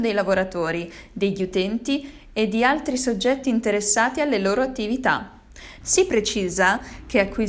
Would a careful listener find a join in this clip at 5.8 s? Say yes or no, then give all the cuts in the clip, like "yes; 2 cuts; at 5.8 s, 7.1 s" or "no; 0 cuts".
yes; 1 cut; at 5.8 s